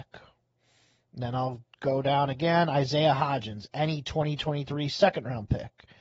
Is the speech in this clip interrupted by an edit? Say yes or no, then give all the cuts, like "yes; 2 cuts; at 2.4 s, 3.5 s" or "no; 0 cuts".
no; 0 cuts